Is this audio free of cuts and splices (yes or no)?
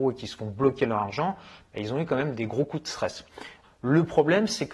no